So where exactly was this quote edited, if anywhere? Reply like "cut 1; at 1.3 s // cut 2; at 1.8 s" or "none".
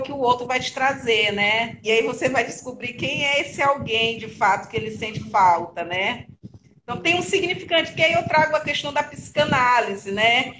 cut 1; at 1.8 s